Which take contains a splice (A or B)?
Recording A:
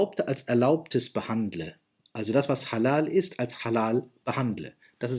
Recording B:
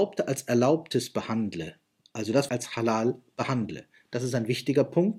B